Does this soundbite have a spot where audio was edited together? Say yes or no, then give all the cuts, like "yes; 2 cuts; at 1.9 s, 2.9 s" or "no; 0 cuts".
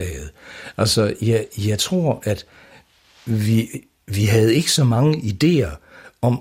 no; 0 cuts